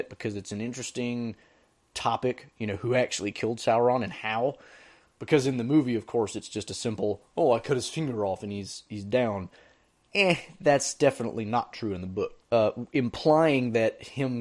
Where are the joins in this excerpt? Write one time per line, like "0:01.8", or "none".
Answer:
0:12.4